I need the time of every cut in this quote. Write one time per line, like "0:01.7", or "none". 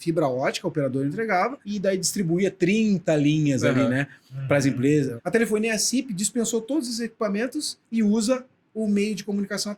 0:07.8